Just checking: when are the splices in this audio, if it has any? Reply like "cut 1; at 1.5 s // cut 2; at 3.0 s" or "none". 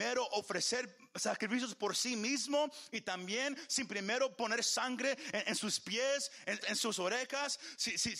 cut 1; at 6.6 s

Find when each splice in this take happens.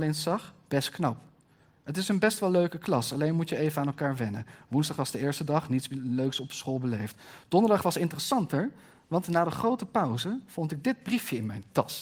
none

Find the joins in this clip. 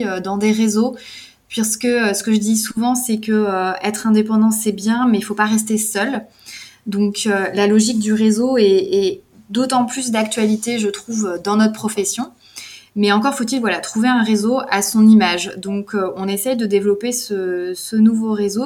none

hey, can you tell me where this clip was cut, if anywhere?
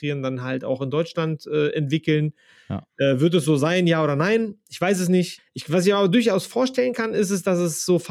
cut 1; at 5.4 s

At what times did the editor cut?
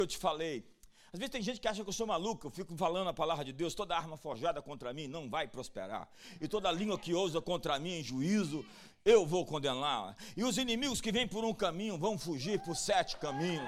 none

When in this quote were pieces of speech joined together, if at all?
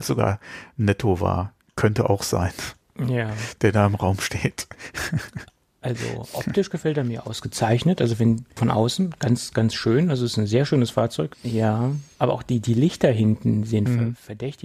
cut 1; at 8.6 s // cut 2; at 11.3 s

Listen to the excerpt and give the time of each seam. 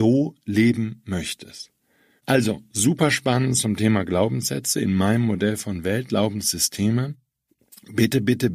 cut 1; at 2.2 s

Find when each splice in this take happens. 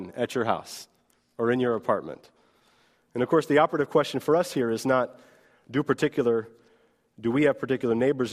none

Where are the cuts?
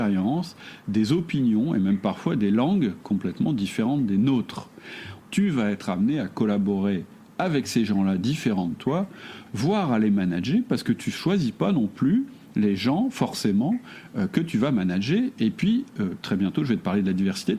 cut 1; at 5.2 s // cut 2; at 9.5 s

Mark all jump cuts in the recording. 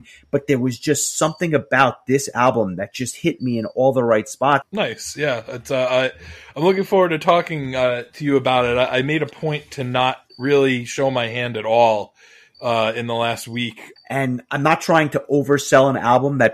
cut 1; at 4.6 s // cut 2; at 14.0 s

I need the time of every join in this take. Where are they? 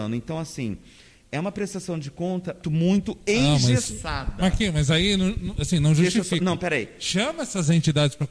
cut 1; at 2.6 s

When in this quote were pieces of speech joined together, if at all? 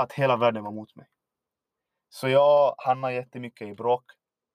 none

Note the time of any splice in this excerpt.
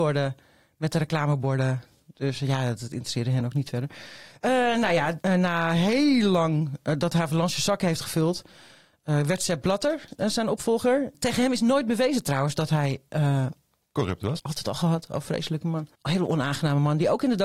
cut 1; at 5.2 s // cut 2; at 14.4 s // cut 3; at 15.9 s

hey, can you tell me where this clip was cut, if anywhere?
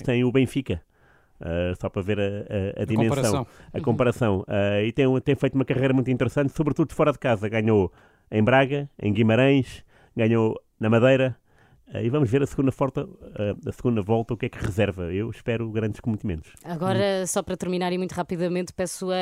none

